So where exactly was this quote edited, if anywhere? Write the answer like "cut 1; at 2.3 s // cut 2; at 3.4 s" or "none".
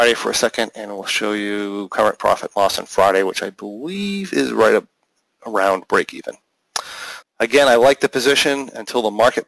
cut 1; at 7.2 s